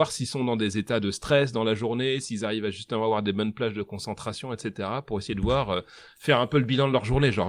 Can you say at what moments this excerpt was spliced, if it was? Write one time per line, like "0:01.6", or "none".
none